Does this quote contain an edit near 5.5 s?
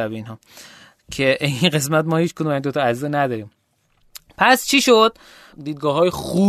yes; 1 cut; at 5.5 s

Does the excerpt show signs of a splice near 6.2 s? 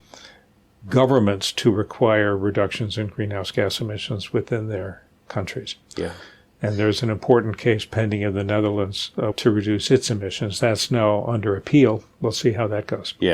no; 1 cut; at 9.3 s

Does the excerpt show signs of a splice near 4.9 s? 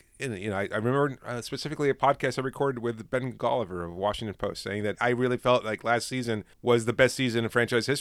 yes; 2 cuts; at 4.9 s, 6.5 s

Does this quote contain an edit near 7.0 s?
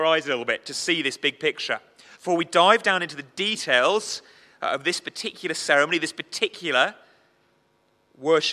no; 1 cut; at 2.1 s

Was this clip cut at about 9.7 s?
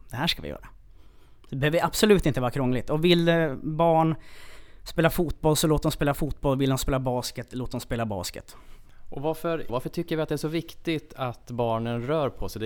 yes; 1 cut; at 9.7 s

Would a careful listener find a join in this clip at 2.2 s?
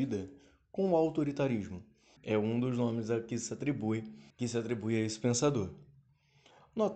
yes; 2 cuts; at 2.2 s, 4.3 s

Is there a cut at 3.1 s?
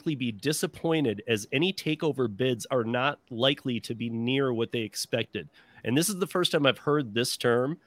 no; 0 cuts

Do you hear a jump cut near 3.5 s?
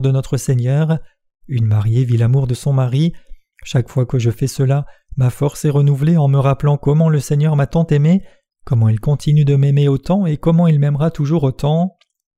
yes; 1 cut; at 3.5 s

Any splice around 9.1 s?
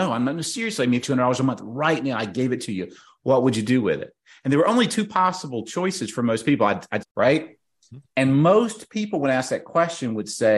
no; 2 cuts; at 1.0 s, 7.0 s

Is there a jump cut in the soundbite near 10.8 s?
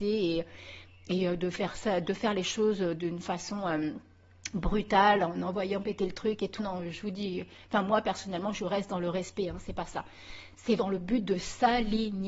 yes; 2 cuts; at 6.6 s, 10.8 s

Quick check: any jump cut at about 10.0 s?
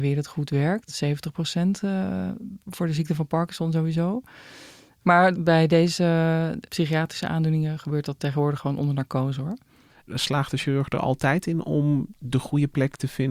yes; 2 cuts; at 5.0 s, 10.0 s

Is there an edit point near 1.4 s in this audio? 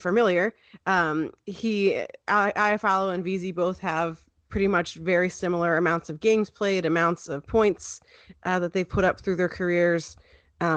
no; 0 cuts

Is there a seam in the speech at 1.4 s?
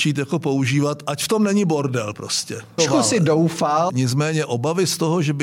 no; 2 cuts; at 2.8 s, 3.9 s

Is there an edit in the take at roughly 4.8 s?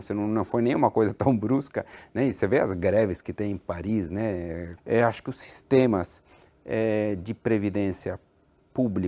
yes; 1 cut; at 4.8 s

